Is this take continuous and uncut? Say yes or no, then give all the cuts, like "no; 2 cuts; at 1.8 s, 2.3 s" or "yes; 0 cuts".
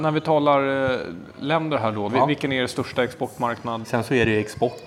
no; 2 cuts; at 2.1 s, 3.8 s